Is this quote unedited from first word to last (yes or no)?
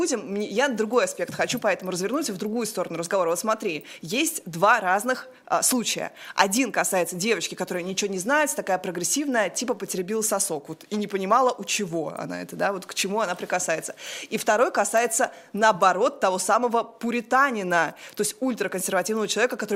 yes